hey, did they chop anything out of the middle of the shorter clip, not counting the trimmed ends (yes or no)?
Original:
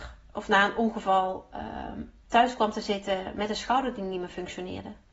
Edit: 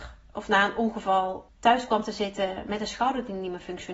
yes